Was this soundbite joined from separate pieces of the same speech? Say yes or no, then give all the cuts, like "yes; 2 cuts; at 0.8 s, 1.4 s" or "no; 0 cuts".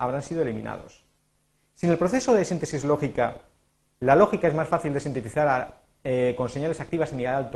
no; 0 cuts